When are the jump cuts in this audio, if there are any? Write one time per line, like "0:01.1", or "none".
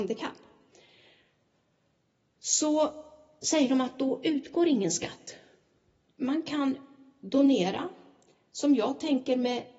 0:06.0